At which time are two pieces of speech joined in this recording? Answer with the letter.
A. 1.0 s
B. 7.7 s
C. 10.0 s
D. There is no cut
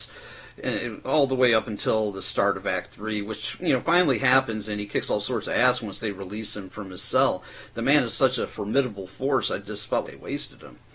C